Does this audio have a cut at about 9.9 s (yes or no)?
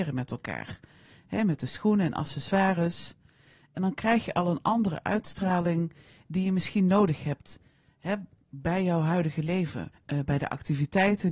yes